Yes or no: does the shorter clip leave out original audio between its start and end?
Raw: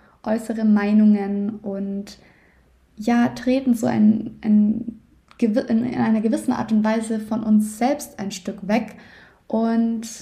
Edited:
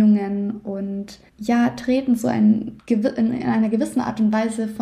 yes